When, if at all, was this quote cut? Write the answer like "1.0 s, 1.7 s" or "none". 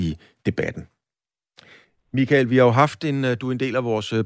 none